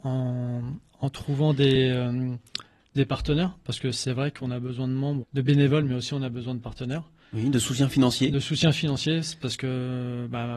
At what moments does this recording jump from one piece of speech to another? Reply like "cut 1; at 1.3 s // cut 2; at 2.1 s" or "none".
cut 1; at 5.2 s